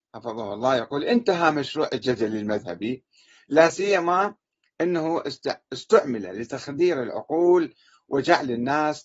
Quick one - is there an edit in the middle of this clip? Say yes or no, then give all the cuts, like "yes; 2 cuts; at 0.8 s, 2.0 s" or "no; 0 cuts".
yes; 1 cut; at 5.7 s